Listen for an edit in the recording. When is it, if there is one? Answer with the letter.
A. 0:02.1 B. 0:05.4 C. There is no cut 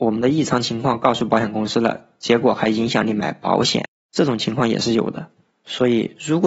C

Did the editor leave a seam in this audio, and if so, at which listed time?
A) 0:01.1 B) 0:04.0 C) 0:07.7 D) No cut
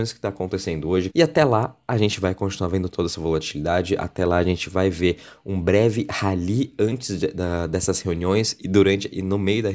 A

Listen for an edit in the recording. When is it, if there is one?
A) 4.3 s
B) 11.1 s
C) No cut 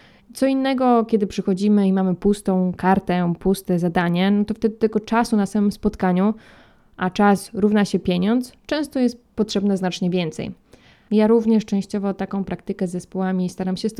B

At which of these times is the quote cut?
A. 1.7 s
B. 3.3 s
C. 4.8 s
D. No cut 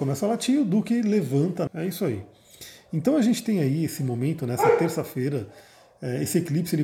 A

